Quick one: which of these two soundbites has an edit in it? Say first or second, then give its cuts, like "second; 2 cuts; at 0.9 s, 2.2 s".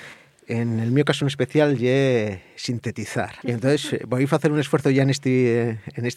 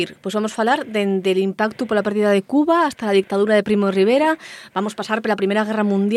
first; 1 cut; at 3.4 s